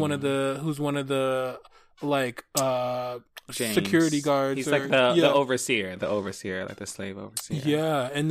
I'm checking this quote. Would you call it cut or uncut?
uncut